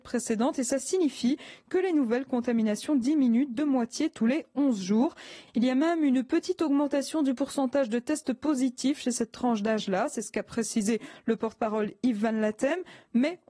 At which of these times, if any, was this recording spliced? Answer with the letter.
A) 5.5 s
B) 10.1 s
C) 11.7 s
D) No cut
A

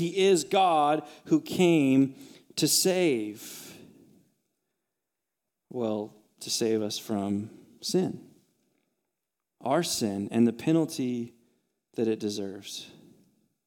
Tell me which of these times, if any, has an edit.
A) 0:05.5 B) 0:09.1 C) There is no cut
A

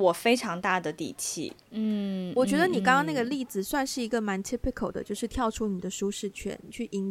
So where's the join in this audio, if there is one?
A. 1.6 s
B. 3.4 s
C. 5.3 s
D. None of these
A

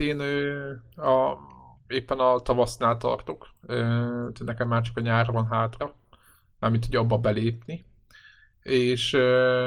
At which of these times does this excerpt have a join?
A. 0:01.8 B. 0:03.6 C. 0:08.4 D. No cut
B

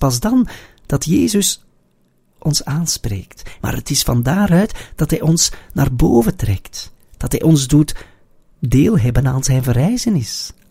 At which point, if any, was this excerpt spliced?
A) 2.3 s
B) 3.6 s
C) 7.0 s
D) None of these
B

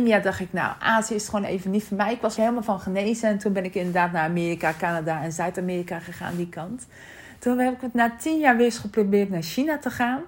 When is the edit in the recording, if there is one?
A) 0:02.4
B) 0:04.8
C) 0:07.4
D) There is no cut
A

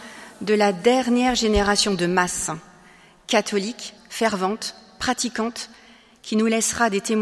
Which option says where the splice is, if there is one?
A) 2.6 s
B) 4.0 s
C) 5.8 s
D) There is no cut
B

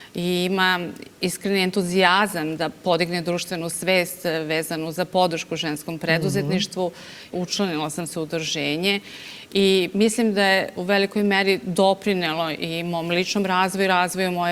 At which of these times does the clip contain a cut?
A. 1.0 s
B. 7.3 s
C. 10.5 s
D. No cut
B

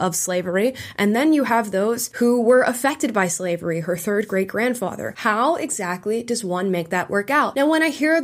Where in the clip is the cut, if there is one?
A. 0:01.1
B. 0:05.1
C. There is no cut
C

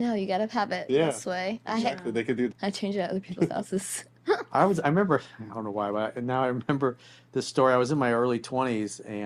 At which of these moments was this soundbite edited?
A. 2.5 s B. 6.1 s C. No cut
A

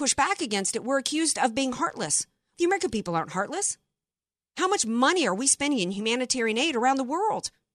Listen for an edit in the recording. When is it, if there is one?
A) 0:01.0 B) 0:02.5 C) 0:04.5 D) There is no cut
B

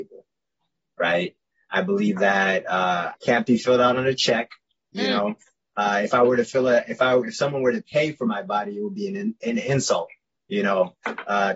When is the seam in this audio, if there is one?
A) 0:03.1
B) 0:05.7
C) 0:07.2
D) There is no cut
A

